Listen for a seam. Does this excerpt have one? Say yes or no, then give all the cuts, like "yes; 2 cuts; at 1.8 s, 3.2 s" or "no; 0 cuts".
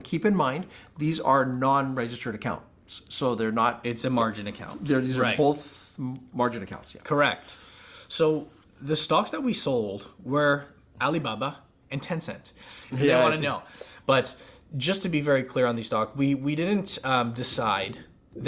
yes; 2 cuts; at 12.9 s, 14.0 s